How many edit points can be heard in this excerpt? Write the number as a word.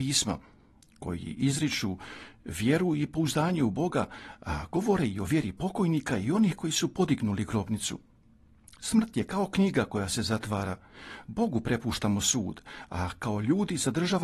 zero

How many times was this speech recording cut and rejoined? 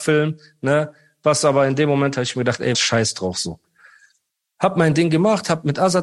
one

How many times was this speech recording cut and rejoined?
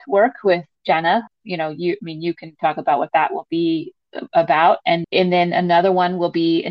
two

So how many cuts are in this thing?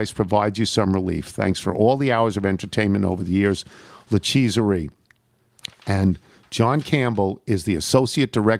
zero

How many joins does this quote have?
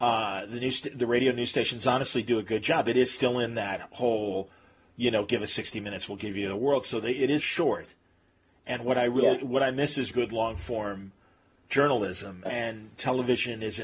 three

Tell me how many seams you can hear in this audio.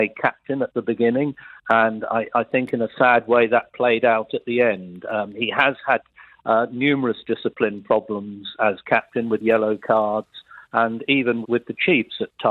one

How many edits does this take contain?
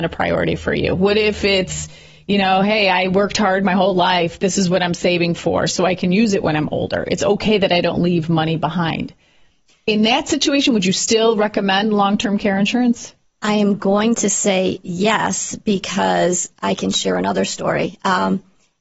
zero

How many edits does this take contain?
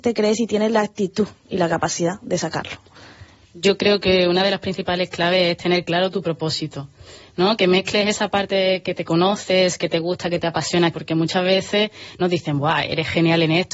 two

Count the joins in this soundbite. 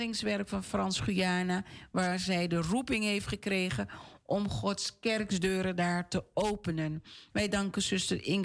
one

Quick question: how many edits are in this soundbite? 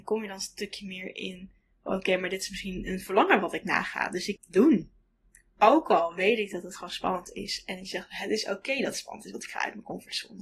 one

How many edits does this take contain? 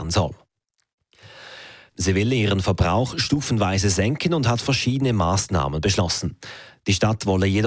two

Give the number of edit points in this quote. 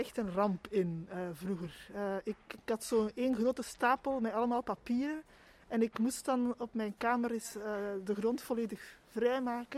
zero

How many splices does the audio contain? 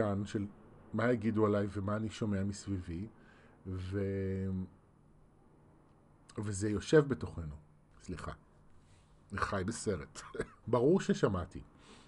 two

